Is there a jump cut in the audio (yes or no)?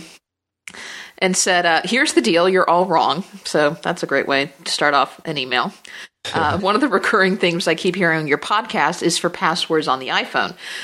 yes